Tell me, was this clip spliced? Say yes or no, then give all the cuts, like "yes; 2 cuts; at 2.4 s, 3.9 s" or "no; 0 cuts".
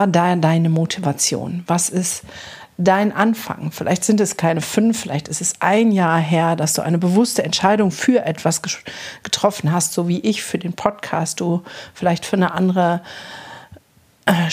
no; 0 cuts